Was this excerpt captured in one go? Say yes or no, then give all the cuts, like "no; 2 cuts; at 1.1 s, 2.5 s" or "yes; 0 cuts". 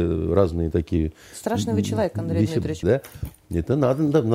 no; 1 cut; at 2.8 s